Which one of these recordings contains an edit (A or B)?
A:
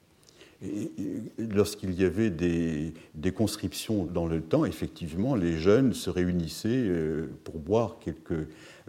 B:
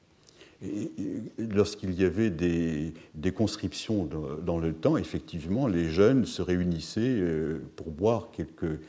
A